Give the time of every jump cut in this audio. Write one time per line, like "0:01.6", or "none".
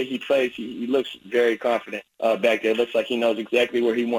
0:02.1